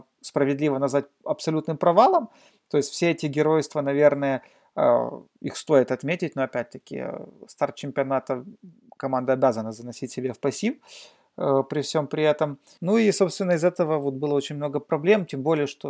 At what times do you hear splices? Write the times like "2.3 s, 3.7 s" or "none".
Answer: 12.8 s

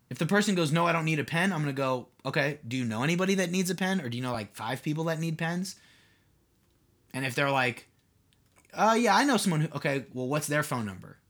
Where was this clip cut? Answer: none

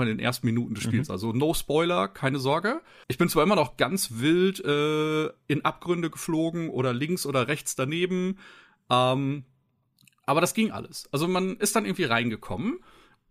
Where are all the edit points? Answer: 3.0 s

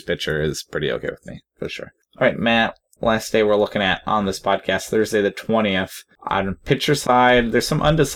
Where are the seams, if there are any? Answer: 3.0 s

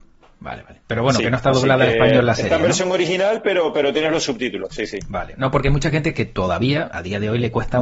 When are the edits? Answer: none

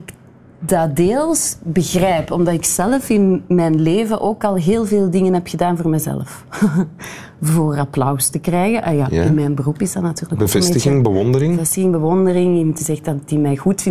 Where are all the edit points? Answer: none

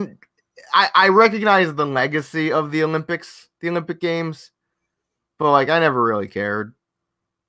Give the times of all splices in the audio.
none

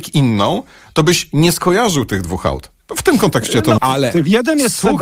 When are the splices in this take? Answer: 3.8 s

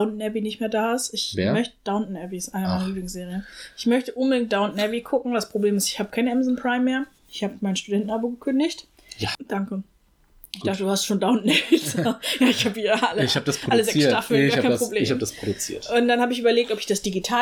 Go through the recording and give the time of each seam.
9.3 s

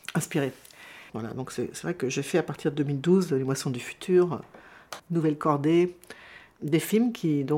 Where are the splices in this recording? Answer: 1.1 s, 5.0 s, 6.6 s

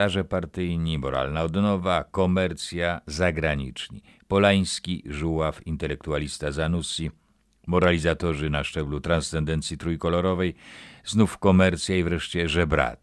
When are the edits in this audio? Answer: 5.0 s

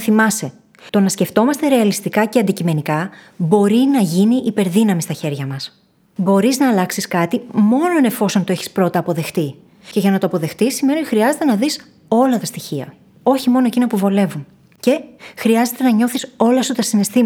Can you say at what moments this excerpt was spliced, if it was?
none

